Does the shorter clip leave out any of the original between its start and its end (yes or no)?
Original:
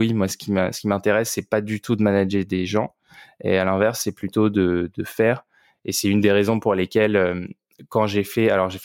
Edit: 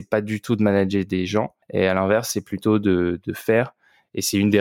yes